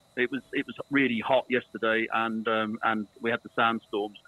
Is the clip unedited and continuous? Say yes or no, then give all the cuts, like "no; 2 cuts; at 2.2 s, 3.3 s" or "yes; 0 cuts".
yes; 0 cuts